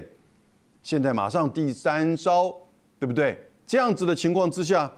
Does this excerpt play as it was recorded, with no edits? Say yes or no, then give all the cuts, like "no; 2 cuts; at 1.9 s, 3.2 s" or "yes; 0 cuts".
no; 1 cut; at 3.7 s